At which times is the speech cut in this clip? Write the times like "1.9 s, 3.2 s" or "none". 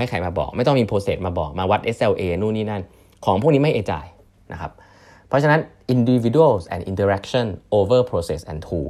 none